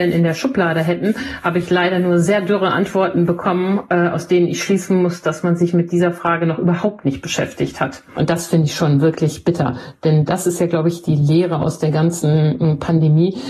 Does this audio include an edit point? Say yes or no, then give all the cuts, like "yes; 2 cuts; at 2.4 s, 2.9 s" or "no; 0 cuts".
no; 0 cuts